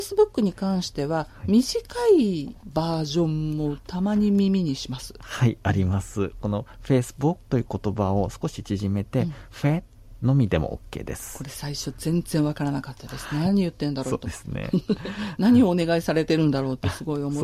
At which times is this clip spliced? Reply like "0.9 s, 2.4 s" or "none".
none